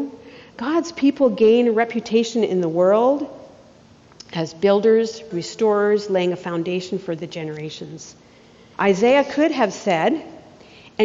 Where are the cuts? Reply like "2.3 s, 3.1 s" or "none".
5.3 s, 8.7 s